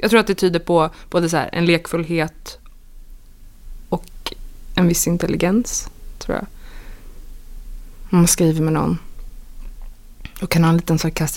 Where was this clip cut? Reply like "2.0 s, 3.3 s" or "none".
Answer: none

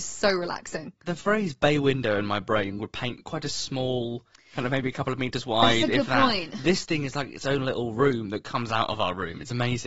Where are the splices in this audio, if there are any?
none

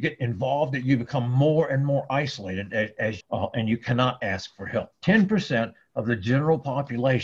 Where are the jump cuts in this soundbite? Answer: 3.2 s, 4.9 s

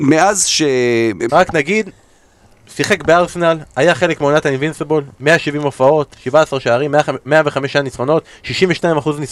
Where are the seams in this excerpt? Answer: 1.3 s

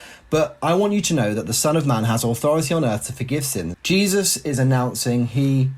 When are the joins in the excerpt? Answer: 3.7 s

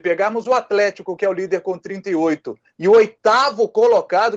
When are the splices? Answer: none

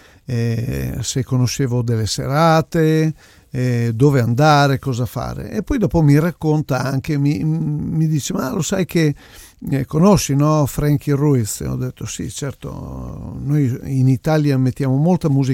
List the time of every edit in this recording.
none

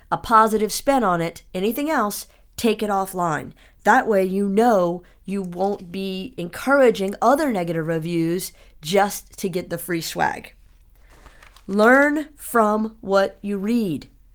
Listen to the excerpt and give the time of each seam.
none

